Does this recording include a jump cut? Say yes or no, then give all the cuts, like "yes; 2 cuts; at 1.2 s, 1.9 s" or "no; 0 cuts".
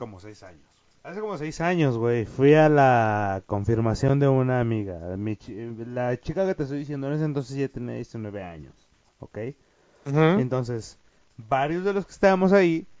no; 0 cuts